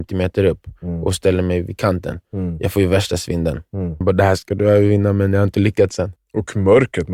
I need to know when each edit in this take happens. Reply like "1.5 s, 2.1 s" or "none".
4.0 s, 6.2 s